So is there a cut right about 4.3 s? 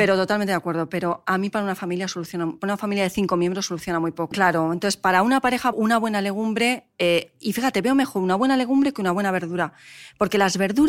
yes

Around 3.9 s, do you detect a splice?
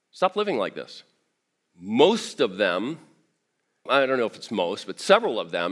yes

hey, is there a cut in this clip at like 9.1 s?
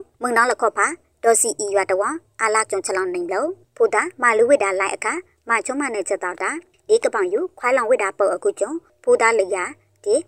no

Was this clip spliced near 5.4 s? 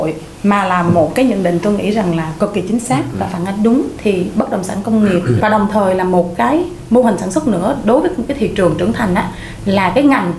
yes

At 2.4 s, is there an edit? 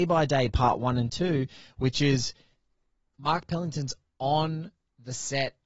no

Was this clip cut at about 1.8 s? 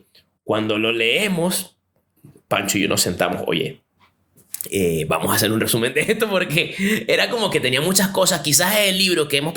no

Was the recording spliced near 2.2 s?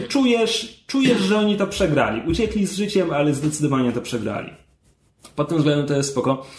no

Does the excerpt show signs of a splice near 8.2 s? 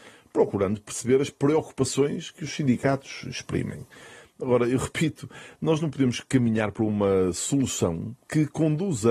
yes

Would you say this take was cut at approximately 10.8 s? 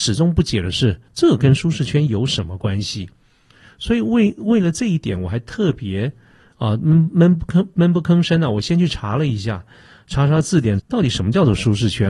yes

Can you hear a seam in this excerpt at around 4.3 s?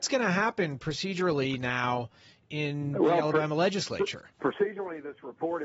yes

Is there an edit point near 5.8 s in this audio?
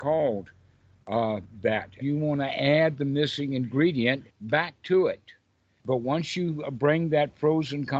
yes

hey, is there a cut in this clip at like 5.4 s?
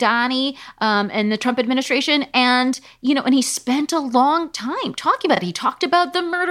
no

